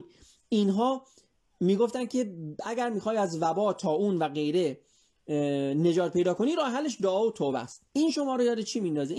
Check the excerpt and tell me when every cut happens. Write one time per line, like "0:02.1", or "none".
0:07.9